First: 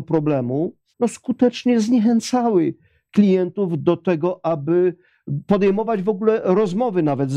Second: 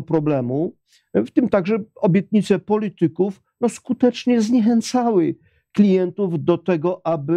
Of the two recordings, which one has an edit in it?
first; 1 cut; at 0.9 s

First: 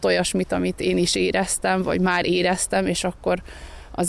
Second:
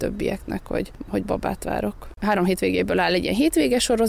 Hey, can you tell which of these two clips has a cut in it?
second; 1 cut; at 2.2 s

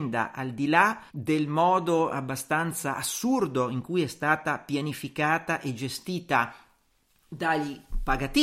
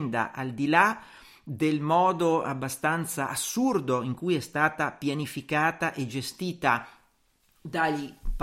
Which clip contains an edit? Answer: first; 1 cut; at 1.1 s

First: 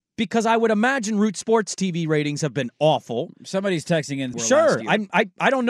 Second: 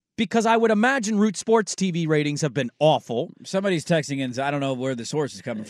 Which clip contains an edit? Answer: first; 1 cut; at 4.3 s

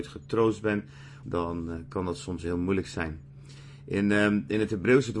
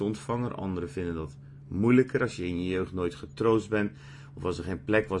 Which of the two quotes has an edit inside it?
first; 1 cut; at 1.2 s

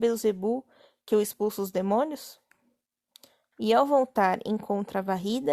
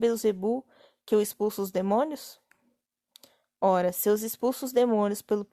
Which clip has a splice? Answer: first; 1 cut; at 3.5 s

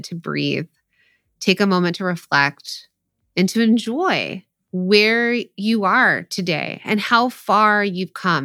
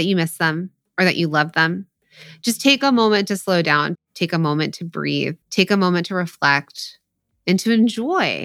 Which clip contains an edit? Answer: second; 2 cuts; at 3.9 s, 5.4 s

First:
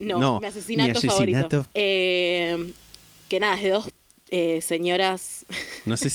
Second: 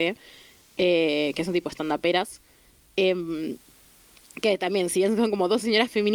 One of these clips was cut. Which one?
first; 1 cut; at 1.7 s

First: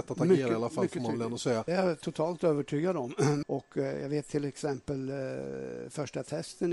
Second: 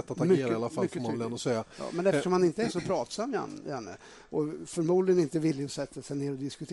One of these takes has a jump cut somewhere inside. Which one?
first; 2 cuts; at 1.7 s, 3.4 s

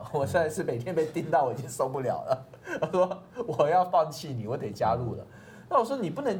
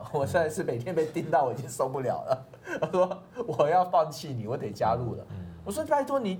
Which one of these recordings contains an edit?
second; 1 cut; at 5.3 s

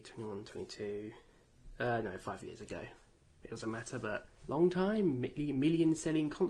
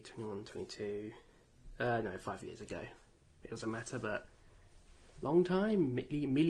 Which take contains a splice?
first; 1 cut; at 4.4 s

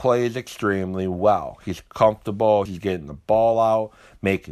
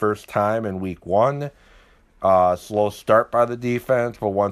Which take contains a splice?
first; 1 cut; at 2.7 s

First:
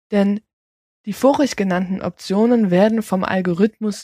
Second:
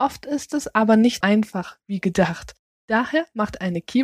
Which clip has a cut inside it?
second; 1 cut; at 1.2 s

